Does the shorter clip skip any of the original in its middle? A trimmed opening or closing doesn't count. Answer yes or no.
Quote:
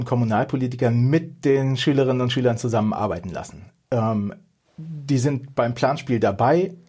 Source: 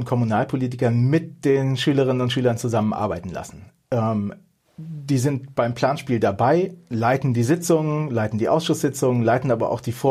no